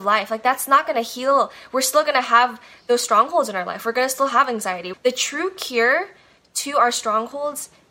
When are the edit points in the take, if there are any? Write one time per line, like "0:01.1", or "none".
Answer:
0:04.9